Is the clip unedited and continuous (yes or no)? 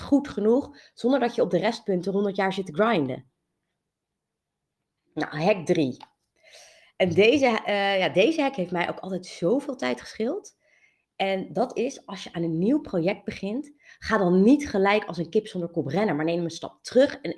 yes